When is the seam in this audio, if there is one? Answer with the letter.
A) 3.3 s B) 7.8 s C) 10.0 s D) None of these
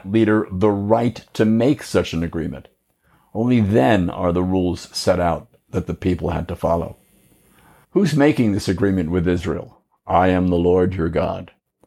B